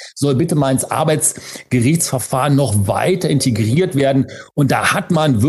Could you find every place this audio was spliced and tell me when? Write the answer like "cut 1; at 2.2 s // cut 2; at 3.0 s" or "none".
none